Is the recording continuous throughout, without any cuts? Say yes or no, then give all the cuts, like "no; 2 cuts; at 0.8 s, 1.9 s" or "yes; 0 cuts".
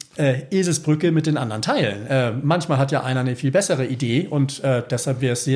yes; 0 cuts